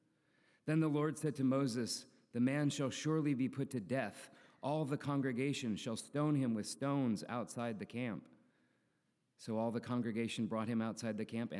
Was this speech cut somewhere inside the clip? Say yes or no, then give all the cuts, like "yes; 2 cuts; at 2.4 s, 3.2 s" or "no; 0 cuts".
no; 0 cuts